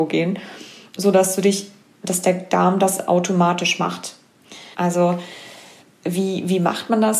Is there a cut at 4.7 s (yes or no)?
yes